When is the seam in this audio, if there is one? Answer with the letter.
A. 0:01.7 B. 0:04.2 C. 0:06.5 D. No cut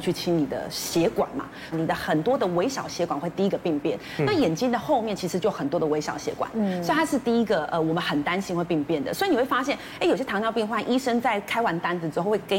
A